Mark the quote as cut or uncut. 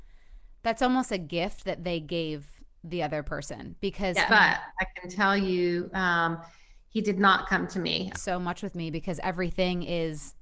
cut